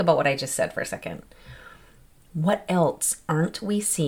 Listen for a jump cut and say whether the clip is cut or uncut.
uncut